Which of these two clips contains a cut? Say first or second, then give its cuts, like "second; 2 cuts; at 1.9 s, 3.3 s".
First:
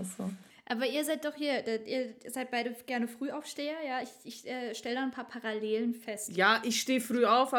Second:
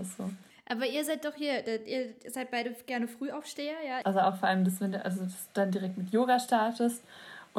second; 1 cut; at 4.0 s